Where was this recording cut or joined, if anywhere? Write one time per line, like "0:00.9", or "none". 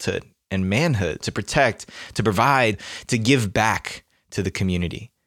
0:01.2